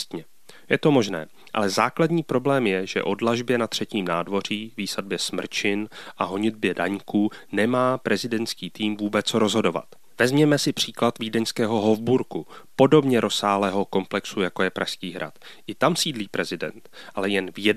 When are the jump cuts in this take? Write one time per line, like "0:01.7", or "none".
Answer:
none